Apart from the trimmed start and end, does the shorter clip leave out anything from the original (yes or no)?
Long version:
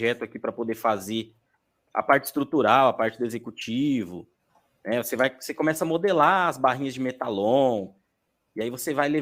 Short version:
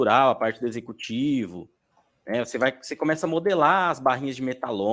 no